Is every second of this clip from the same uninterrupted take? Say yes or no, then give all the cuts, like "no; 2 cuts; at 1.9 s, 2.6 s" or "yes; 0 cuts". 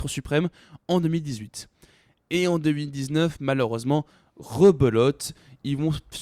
yes; 0 cuts